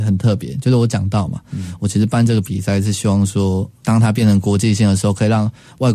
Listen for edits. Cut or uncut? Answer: uncut